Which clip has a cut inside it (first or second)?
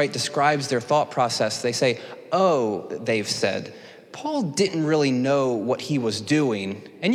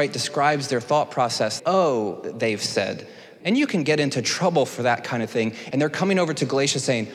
second